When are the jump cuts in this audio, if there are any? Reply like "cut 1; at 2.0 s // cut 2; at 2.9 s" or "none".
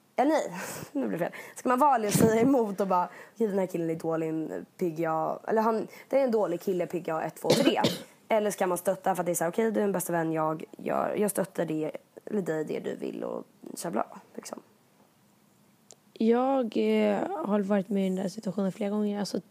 none